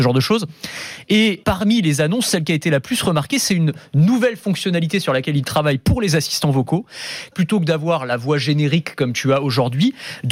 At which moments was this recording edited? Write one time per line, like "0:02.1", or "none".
0:01.4
0:07.3